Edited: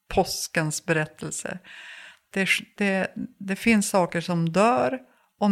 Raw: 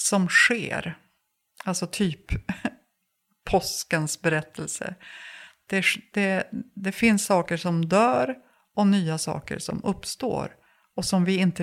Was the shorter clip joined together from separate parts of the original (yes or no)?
no